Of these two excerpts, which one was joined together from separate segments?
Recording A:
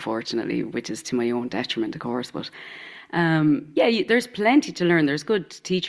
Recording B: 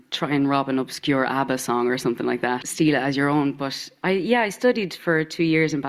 B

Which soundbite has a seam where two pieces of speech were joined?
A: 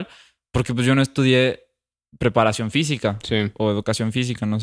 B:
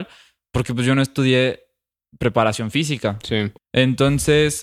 B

